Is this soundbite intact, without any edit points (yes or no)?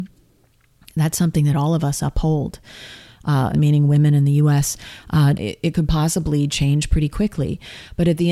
no